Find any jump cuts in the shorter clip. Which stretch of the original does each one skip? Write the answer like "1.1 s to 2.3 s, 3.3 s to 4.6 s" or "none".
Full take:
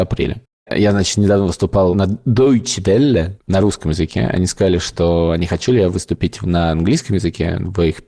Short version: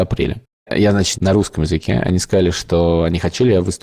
1.1 s to 3.4 s